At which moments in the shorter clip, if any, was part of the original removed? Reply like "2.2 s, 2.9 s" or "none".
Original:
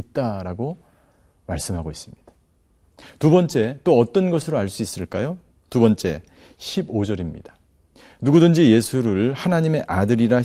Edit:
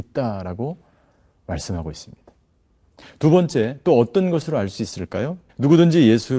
5.5 s